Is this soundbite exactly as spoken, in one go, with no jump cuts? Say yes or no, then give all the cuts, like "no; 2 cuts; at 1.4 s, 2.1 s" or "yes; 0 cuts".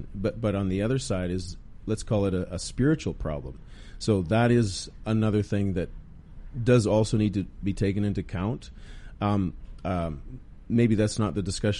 yes; 0 cuts